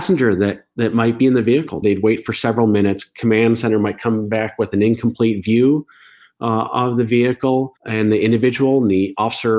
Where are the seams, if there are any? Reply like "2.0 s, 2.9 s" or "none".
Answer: 1.8 s, 7.8 s